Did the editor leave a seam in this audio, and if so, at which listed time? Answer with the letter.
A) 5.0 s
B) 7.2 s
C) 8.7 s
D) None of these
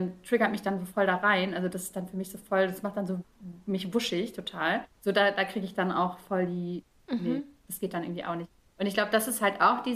A